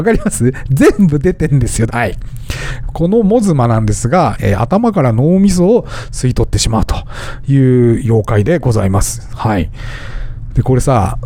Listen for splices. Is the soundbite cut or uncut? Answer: cut